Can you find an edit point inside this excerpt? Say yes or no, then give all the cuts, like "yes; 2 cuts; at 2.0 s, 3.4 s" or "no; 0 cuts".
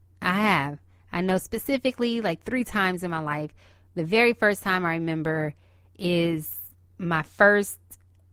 no; 0 cuts